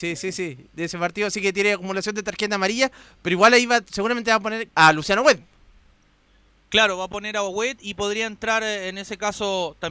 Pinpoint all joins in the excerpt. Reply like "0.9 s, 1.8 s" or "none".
4.7 s